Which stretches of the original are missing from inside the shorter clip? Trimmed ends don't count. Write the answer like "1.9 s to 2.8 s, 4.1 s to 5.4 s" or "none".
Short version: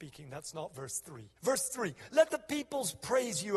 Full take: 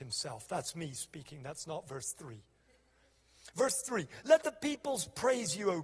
2.5 s to 3.5 s